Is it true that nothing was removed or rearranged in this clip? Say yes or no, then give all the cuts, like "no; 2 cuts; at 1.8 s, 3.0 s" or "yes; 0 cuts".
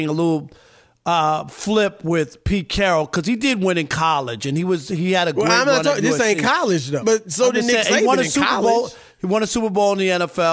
no; 1 cut; at 7.0 s